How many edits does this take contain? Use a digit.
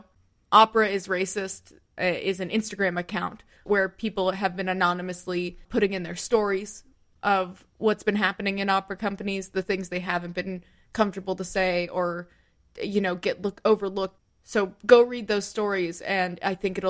1